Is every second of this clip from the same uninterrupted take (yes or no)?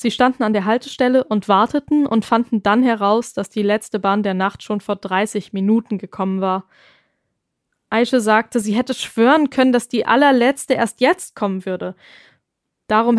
yes